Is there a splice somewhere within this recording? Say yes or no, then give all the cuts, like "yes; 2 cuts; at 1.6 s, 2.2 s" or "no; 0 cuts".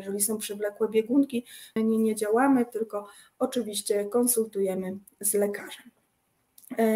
yes; 1 cut; at 1.8 s